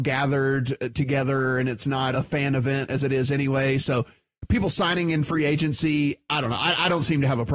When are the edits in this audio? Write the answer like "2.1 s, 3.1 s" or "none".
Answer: 2.1 s